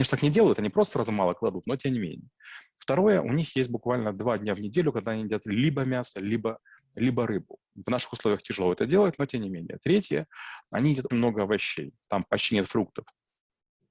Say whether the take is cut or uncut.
cut